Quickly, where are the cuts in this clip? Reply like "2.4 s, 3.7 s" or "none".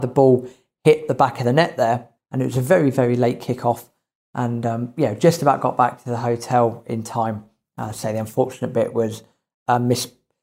2.2 s